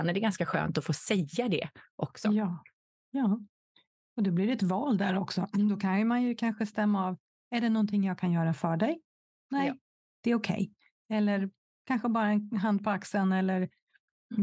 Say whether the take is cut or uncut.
uncut